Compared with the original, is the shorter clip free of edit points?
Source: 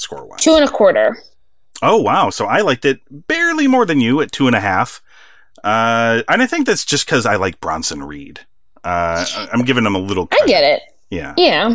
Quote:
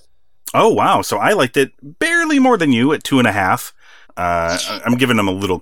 no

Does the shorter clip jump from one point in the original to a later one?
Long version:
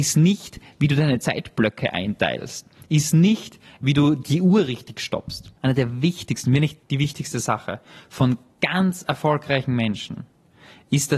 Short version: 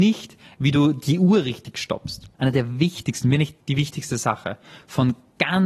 no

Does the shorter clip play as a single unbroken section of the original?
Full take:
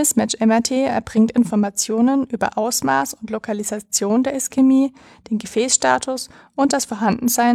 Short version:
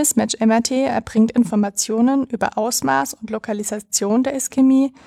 yes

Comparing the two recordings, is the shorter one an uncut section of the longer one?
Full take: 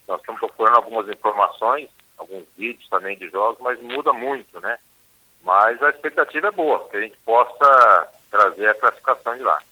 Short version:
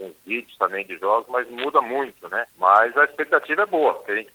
no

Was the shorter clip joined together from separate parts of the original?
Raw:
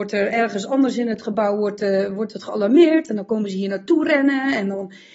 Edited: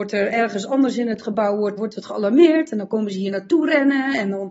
yes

